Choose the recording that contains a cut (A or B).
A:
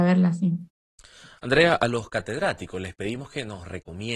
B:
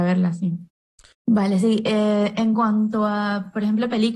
B